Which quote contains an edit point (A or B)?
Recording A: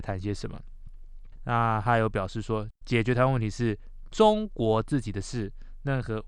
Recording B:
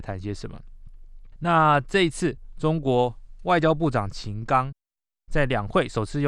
A